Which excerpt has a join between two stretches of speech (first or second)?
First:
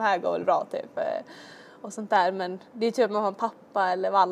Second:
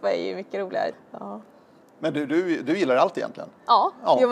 second